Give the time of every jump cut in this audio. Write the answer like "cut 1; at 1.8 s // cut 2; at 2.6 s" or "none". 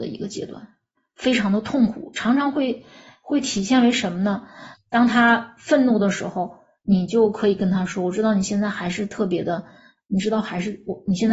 cut 1; at 4.7 s